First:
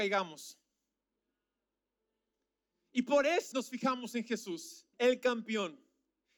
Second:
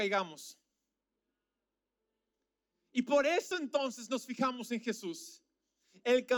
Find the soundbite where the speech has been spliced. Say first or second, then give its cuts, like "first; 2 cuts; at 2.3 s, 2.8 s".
first; 2 cuts; at 3.5 s, 4.9 s